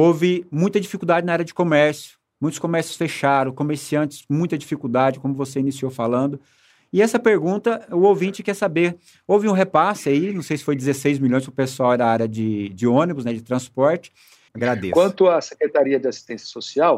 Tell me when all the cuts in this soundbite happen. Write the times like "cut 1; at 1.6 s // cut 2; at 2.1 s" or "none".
cut 1; at 14.5 s